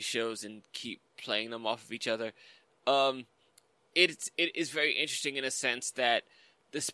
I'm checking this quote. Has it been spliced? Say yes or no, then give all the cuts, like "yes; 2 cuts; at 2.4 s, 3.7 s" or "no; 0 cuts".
no; 0 cuts